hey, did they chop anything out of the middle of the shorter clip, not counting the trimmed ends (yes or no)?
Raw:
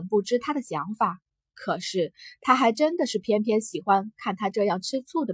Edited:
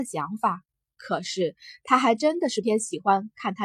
yes